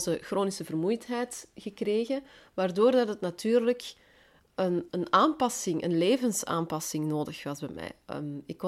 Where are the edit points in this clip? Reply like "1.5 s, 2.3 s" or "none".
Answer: 4.9 s